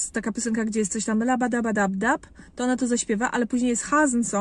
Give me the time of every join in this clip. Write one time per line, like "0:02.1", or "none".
none